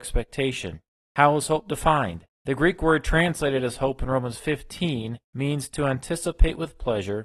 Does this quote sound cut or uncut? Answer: cut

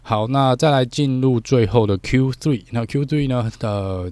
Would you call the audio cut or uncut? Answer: uncut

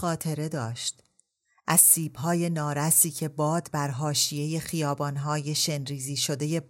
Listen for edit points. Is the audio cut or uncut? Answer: uncut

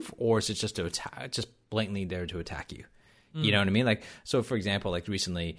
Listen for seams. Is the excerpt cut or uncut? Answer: uncut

